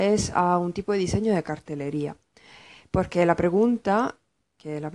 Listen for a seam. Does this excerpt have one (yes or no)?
no